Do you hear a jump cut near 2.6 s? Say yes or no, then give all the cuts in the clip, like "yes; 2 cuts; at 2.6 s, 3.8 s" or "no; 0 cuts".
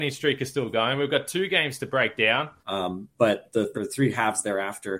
yes; 2 cuts; at 2.6 s, 3.7 s